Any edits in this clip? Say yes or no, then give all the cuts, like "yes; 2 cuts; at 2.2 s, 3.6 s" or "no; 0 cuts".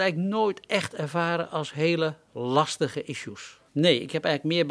yes; 1 cut; at 3.7 s